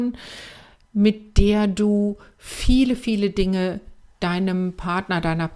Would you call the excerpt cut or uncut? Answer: uncut